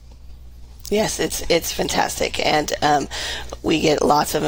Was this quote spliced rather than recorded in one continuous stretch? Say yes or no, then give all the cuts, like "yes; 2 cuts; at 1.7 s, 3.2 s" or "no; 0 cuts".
no; 0 cuts